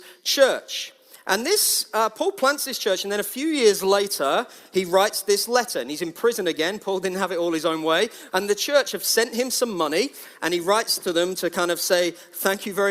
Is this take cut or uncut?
cut